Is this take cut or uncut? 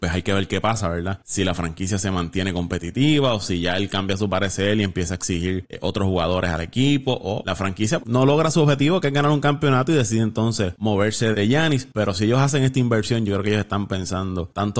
cut